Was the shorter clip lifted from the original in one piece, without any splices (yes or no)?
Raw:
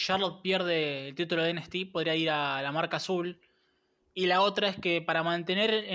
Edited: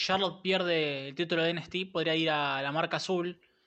yes